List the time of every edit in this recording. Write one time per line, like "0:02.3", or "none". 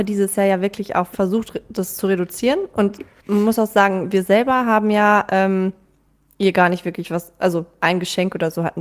0:01.1